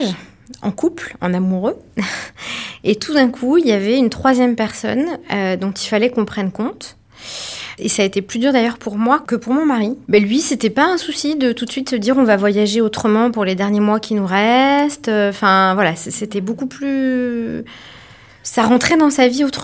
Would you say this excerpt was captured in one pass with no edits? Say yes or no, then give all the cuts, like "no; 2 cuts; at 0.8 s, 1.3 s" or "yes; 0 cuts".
yes; 0 cuts